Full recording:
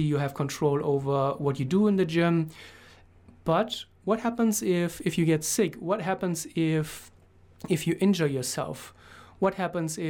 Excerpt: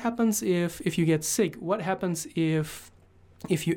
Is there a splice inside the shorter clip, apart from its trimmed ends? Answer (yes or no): no